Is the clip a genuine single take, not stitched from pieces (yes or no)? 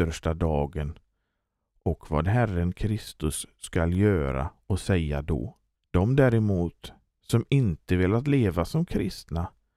no